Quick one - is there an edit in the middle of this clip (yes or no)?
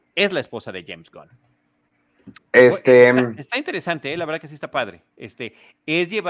yes